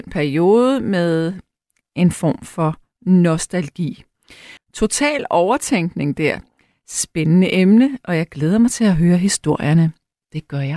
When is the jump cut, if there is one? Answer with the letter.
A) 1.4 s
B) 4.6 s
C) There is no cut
B